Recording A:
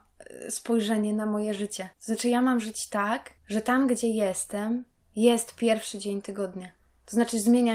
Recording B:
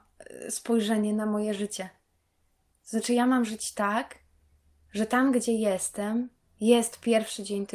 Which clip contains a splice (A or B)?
A